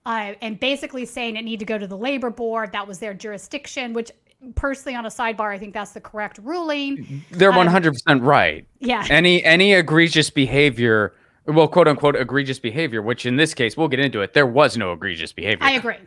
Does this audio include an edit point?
no; 0 cuts

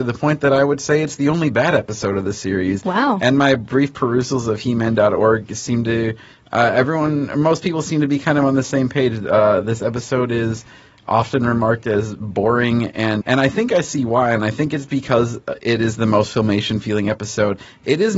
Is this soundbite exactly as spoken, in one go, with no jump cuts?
no; 1 cut; at 13.2 s

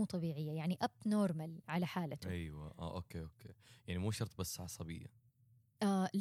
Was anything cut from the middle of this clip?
yes; 1 cut; at 1.6 s

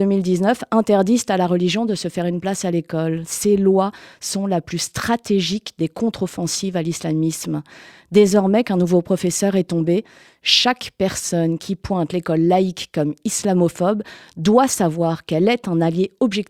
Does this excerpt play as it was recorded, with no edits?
yes; 0 cuts

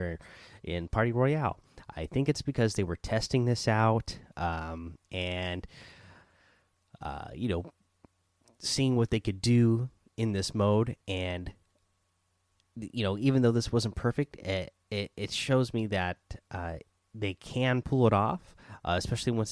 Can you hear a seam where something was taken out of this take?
no; 0 cuts

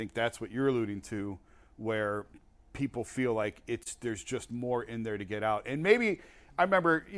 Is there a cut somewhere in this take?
no; 0 cuts

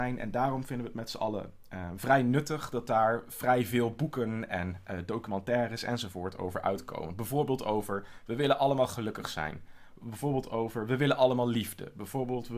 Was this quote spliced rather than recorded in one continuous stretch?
no; 0 cuts

